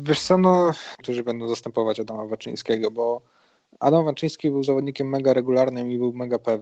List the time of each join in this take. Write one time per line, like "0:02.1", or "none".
0:01.0